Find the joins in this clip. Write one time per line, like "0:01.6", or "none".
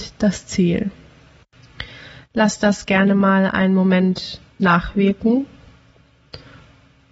none

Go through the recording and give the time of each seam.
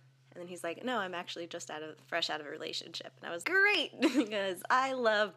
0:03.4

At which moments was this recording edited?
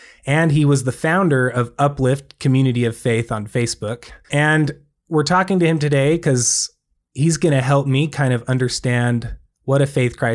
0:04.2

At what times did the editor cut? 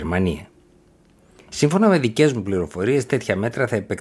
none

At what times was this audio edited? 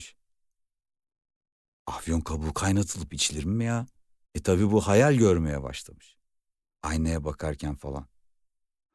0:04.2
0:06.8

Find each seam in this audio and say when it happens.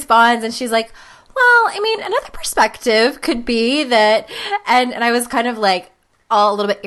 none

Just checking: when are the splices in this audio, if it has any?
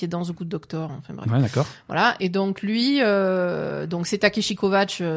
0:02.2

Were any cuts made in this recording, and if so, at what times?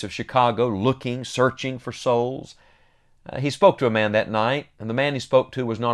none

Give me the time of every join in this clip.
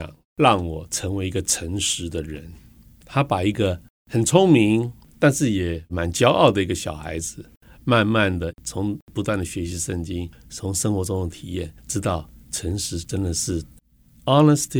none

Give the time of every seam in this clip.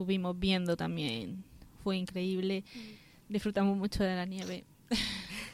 none

